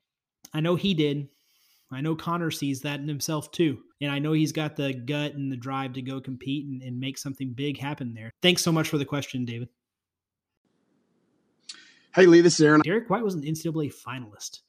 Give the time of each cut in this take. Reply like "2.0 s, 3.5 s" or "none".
3.9 s, 8.3 s, 12.8 s